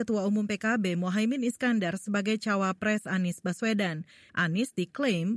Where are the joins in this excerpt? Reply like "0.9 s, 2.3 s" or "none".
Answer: 4.3 s